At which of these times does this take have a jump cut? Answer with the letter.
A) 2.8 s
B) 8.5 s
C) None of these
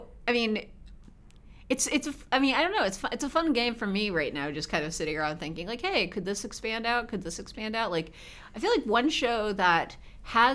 C